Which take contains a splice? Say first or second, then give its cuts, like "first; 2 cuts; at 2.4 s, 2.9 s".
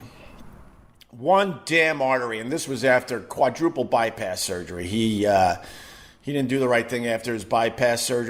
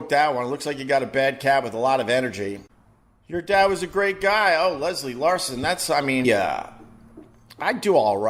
second; 1 cut; at 6.2 s